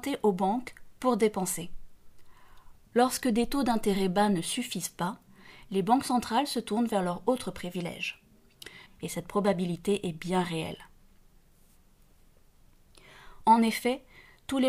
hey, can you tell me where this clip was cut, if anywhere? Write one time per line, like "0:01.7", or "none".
0:02.9
0:08.9